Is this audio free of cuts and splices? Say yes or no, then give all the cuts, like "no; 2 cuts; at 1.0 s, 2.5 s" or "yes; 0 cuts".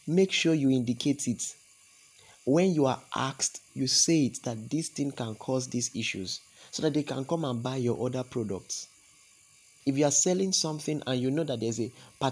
no; 2 cuts; at 3.7 s, 9.8 s